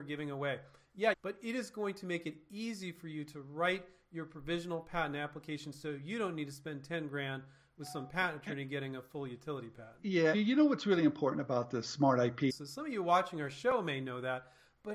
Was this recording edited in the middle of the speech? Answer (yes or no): yes